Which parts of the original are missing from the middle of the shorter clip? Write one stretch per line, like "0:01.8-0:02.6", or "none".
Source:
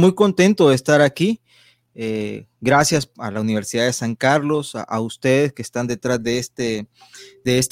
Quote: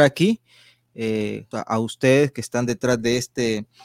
0:02.5-0:04.7